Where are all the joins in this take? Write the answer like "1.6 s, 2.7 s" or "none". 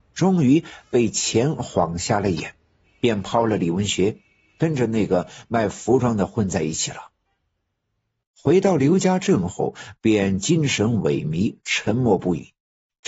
8.2 s

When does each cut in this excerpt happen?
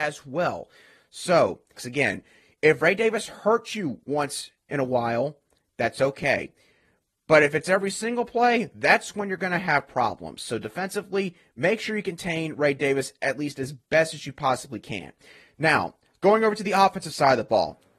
1.8 s

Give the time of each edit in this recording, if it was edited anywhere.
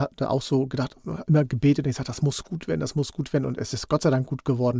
none

